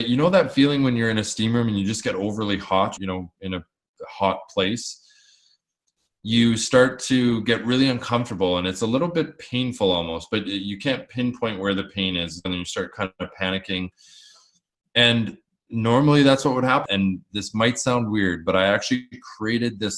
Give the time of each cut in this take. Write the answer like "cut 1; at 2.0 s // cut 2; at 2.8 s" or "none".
cut 1; at 3.0 s // cut 2; at 12.4 s // cut 3; at 16.8 s